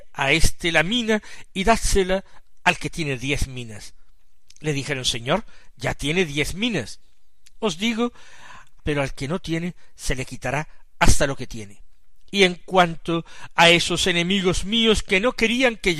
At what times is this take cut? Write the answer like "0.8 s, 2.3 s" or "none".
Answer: 8.8 s